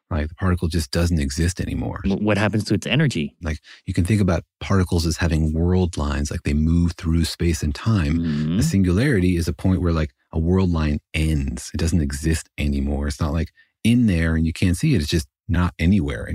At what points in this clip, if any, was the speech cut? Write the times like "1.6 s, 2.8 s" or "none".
2.0 s, 3.4 s